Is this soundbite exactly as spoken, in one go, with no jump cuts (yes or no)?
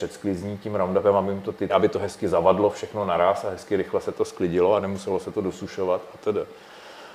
no